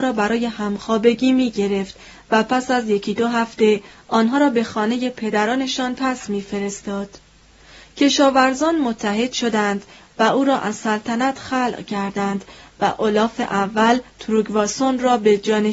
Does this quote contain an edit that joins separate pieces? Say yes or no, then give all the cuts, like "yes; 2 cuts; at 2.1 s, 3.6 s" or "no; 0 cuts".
no; 0 cuts